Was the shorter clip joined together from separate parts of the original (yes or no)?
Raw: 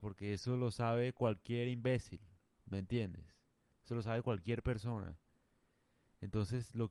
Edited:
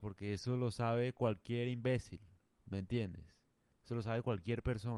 no